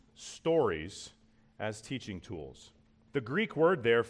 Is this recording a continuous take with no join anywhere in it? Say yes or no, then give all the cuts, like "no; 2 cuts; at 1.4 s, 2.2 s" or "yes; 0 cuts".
no; 1 cut; at 3.1 s